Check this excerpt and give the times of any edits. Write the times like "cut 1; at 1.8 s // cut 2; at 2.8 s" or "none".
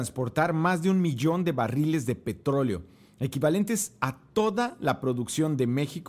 none